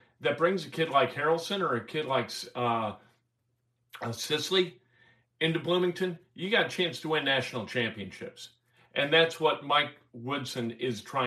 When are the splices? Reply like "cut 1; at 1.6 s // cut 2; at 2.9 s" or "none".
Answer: none

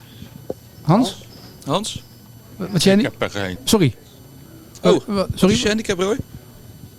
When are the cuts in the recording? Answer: cut 1; at 3.6 s

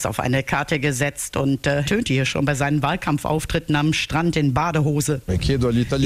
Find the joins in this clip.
cut 1; at 1.8 s

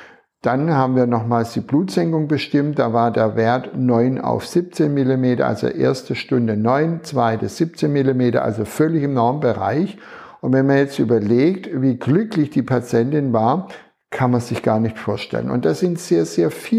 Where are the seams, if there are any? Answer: none

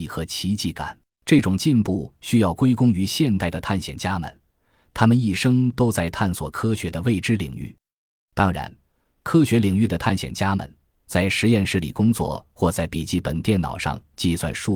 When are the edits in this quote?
cut 1; at 1.1 s

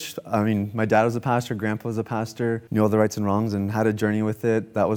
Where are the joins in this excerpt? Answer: cut 1; at 2.7 s

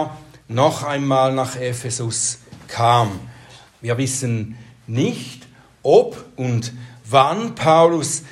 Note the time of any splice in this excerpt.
cut 1; at 3.7 s

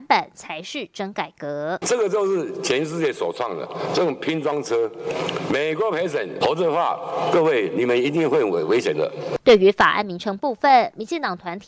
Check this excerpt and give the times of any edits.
cut 1; at 1.8 s // cut 2; at 6.4 s

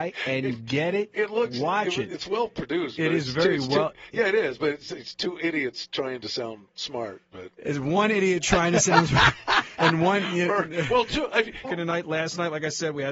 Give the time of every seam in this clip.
cut 1; at 11.6 s

